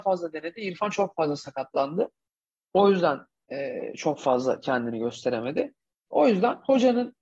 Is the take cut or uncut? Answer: uncut